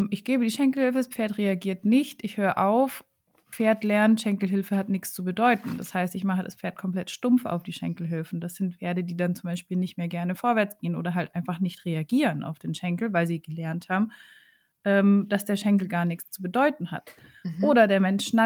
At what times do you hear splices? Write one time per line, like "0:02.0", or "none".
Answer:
none